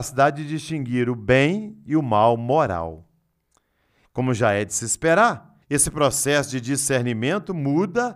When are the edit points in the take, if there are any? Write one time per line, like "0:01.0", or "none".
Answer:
0:04.1
0:05.6